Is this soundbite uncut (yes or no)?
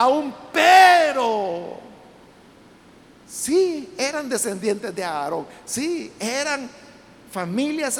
yes